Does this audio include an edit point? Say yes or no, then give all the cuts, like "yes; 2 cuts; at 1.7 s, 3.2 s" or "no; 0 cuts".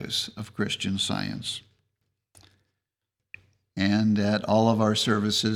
no; 0 cuts